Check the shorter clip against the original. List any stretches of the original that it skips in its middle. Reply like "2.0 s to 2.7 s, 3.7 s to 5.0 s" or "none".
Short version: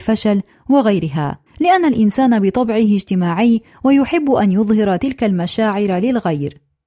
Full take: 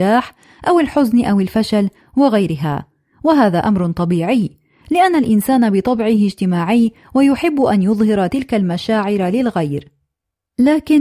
2.9 s to 4.8 s